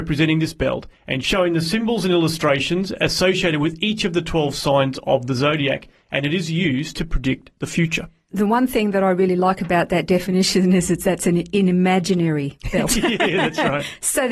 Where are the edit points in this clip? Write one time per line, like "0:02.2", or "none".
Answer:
none